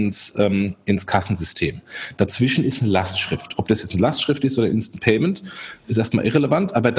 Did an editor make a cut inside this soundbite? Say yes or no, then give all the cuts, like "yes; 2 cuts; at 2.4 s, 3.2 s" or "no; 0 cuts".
no; 0 cuts